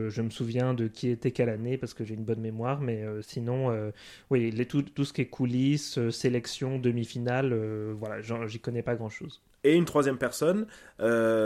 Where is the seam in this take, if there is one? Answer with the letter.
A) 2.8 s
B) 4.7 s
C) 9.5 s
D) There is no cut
D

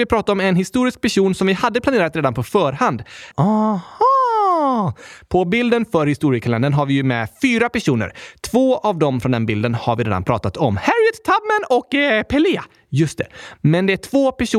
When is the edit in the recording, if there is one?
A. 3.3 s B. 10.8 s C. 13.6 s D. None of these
A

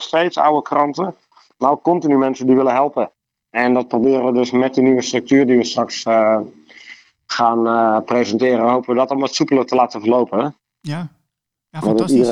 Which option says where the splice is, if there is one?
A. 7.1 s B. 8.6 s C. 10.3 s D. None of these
D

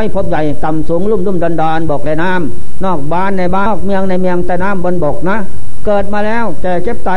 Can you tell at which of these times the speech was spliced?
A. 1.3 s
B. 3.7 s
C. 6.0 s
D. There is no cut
B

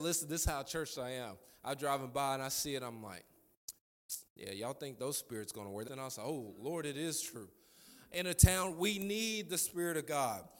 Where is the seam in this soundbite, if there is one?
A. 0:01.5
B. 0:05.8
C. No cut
B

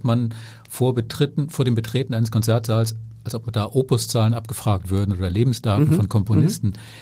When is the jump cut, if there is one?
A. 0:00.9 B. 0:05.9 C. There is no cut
C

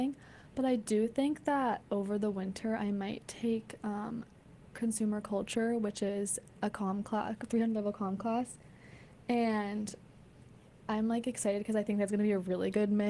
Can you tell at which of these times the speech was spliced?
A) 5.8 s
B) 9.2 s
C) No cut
C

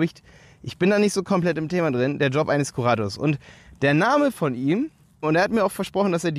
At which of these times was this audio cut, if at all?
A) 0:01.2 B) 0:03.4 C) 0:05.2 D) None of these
C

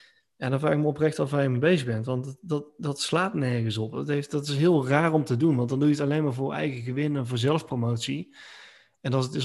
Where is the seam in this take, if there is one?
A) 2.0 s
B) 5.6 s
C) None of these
C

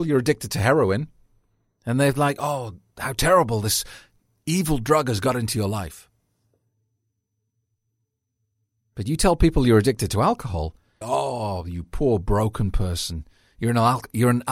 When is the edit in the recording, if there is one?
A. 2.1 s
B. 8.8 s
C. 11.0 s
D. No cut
C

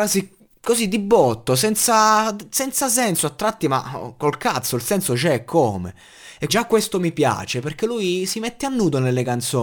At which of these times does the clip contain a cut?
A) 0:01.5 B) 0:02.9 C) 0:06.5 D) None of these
C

